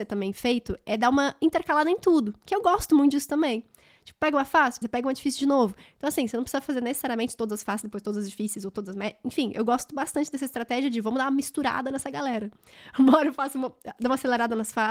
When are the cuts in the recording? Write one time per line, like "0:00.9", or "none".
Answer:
0:04.8

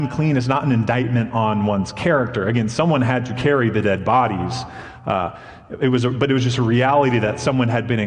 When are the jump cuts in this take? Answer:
none

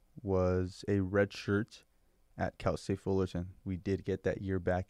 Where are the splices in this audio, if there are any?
0:03.6

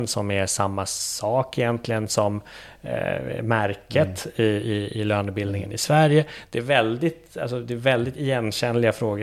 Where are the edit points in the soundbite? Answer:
none

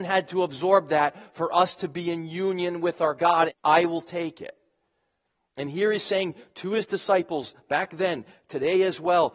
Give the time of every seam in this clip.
0:03.5

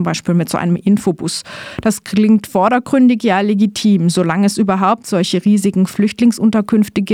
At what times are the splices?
none

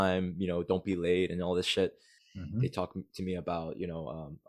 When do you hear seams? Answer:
0:02.2

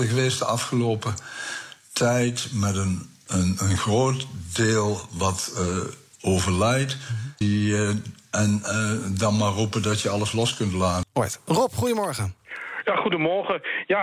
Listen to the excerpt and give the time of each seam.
0:07.4
0:11.0

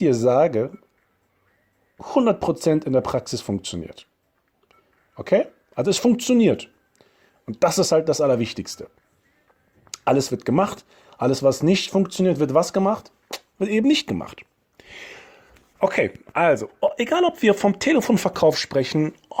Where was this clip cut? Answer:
0:10.3

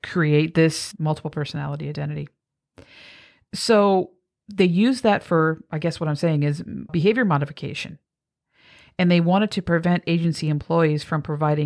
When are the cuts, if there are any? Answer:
0:06.9

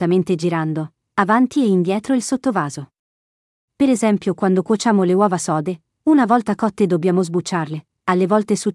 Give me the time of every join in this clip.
0:03.7

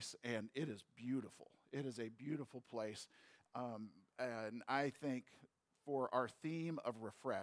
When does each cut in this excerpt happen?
none

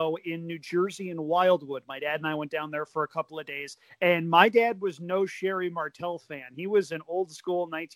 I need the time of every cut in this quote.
none

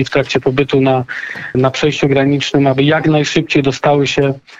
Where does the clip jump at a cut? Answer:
0:01.5

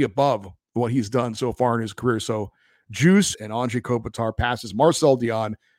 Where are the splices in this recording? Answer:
0:03.3

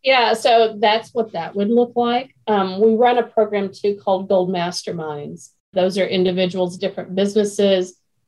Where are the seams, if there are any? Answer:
0:06.8

